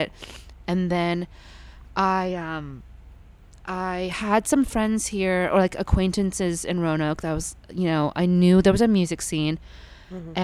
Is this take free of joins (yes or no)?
yes